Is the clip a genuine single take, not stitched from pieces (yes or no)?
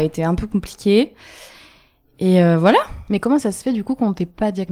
yes